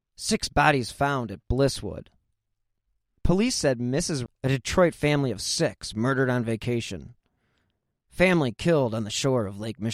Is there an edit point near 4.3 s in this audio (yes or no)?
yes